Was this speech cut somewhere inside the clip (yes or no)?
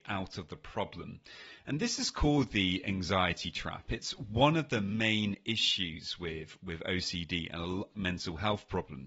yes